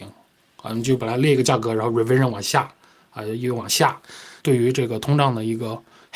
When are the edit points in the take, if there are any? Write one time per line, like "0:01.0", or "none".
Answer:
0:01.0
0:04.4